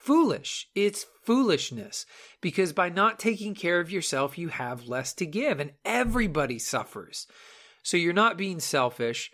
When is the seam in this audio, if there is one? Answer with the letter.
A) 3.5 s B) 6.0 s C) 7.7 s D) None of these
D